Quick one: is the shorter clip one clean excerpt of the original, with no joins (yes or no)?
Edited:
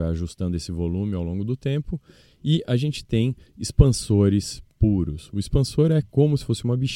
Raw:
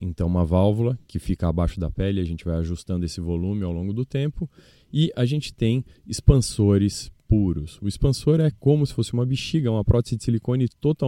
yes